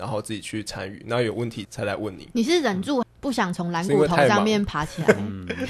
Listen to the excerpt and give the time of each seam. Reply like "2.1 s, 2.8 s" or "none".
1.6 s, 3.0 s

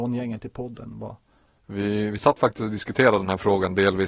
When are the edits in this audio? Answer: 1.6 s

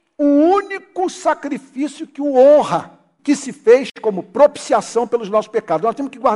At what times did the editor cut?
3.2 s

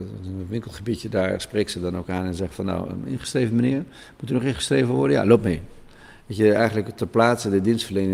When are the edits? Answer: none

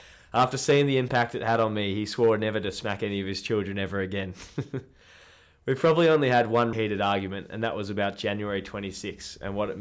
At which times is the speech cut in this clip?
6.7 s

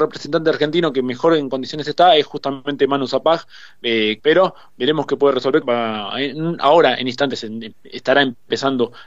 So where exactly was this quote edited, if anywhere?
4.2 s, 5.6 s

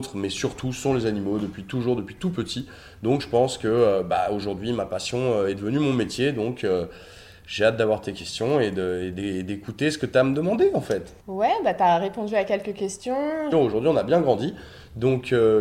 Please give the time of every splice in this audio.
11.2 s, 13.5 s

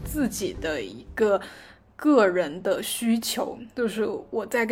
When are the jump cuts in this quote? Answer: none

